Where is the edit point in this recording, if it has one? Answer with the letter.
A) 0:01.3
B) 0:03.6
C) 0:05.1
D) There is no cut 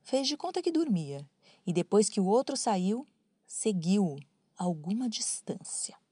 D